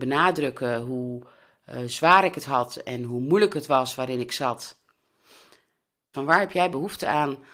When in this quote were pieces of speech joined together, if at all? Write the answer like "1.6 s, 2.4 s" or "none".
6.1 s